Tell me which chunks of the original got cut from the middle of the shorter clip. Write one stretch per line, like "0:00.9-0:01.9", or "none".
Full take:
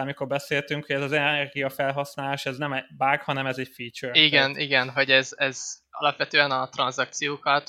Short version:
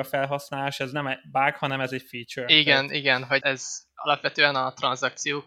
0:05.1-0:05.4